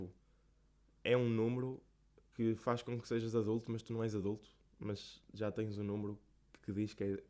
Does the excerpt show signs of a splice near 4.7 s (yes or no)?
no